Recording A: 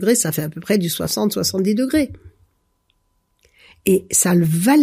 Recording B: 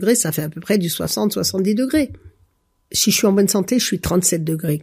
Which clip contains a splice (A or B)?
B